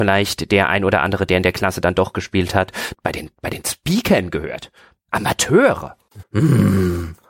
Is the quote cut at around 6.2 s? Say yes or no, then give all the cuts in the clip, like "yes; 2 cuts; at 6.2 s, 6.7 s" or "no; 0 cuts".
yes; 2 cuts; at 2.9 s, 6.2 s